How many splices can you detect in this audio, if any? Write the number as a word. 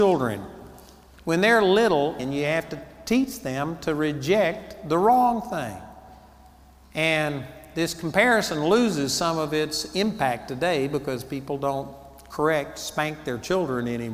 one